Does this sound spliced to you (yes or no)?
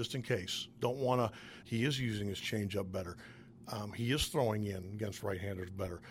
yes